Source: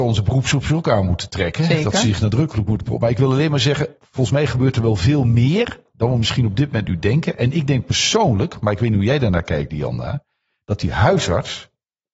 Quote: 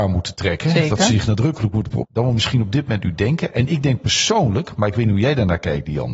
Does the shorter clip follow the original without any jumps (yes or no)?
no